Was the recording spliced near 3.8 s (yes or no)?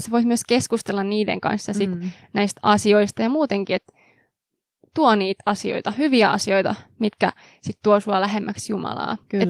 no